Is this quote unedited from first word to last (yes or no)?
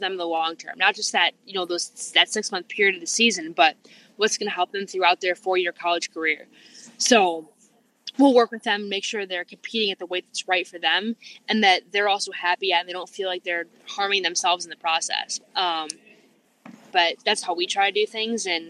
no